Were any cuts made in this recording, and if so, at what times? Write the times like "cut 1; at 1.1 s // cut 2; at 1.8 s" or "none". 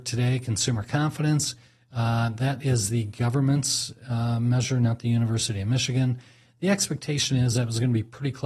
none